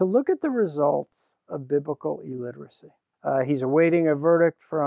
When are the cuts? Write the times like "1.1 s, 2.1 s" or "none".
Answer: 3.1 s